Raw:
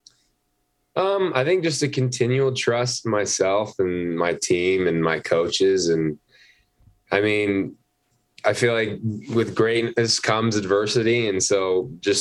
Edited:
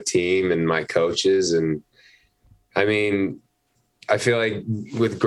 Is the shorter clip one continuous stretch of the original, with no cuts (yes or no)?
yes